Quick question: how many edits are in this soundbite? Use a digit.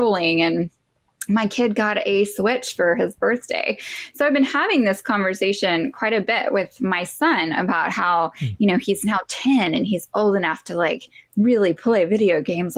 0